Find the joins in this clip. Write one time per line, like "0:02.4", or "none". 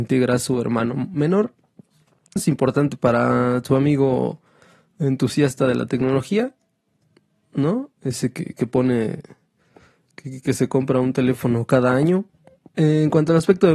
0:02.4
0:12.7